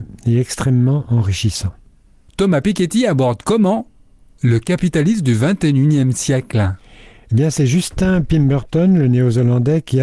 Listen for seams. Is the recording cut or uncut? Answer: uncut